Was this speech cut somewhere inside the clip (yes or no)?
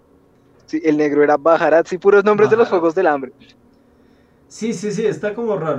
no